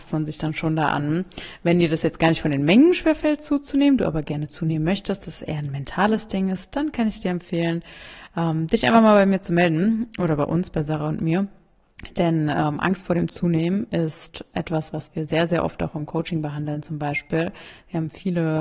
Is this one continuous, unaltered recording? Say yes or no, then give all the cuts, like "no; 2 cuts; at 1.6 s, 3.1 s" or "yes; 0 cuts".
yes; 0 cuts